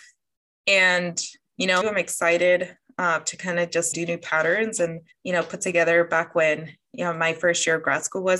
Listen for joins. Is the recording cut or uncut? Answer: cut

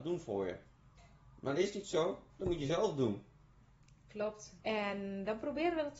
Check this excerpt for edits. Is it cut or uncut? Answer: cut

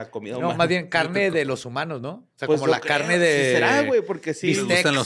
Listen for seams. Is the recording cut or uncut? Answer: uncut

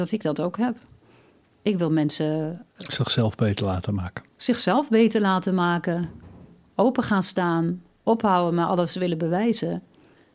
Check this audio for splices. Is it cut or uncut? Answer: uncut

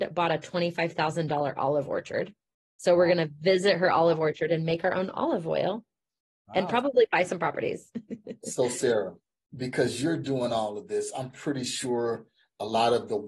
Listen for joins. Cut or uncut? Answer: uncut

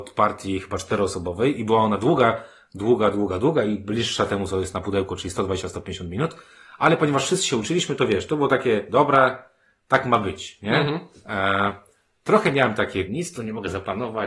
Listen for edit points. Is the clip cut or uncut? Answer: cut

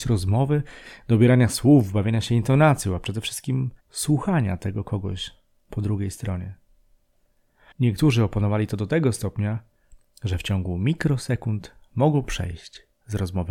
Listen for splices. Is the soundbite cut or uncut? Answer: cut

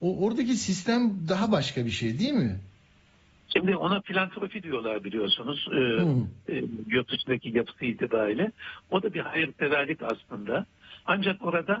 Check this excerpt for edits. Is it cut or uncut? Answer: uncut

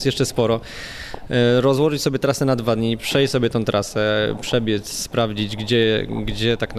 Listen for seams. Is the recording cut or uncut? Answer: uncut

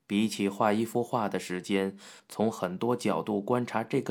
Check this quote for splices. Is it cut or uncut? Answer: cut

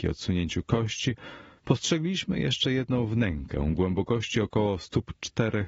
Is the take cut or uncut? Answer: uncut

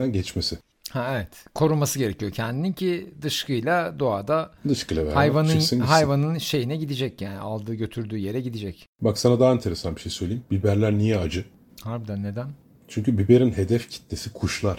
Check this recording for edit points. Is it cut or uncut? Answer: uncut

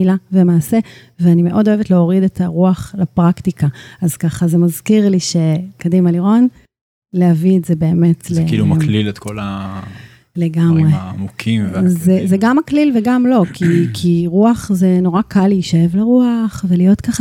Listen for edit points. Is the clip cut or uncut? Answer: uncut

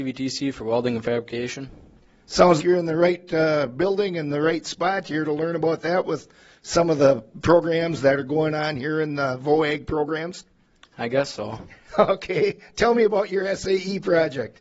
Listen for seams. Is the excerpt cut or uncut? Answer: cut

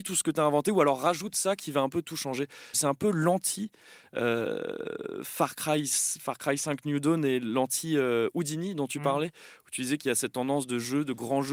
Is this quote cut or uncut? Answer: cut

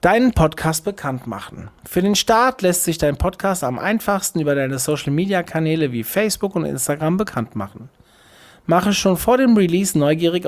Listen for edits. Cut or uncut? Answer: uncut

